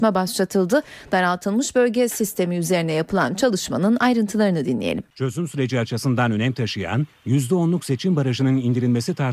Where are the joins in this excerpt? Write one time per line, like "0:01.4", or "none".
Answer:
0:05.1